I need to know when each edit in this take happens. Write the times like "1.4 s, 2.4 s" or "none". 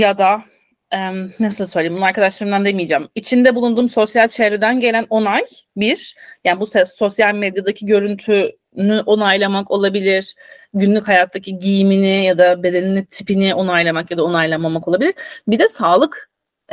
none